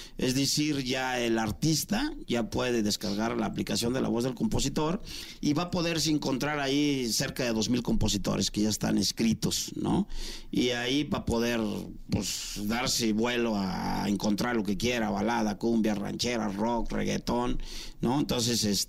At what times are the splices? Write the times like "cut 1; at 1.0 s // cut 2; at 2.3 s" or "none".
none